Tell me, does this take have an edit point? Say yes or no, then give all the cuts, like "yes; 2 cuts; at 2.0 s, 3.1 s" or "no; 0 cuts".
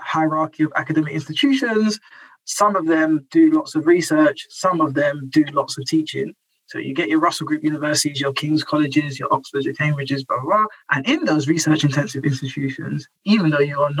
yes; 2 cuts; at 9.2 s, 10.8 s